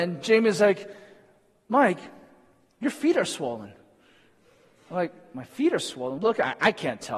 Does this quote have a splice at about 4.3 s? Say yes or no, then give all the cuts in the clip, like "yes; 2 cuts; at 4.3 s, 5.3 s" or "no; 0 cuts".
no; 1 cut; at 6.2 s